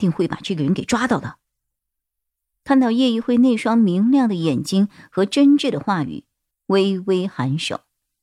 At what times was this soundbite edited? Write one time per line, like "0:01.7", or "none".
0:06.5